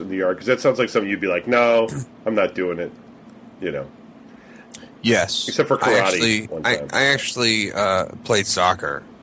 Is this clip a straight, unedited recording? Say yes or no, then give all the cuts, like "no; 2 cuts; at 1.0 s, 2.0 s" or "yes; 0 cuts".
yes; 0 cuts